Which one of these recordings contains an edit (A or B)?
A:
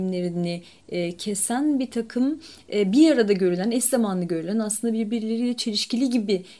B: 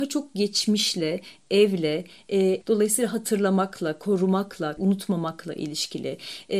B